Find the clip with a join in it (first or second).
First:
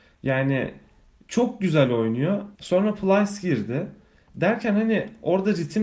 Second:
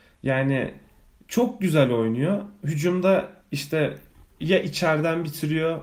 first